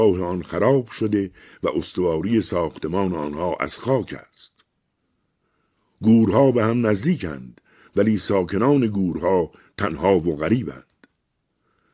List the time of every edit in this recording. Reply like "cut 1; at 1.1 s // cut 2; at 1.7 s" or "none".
none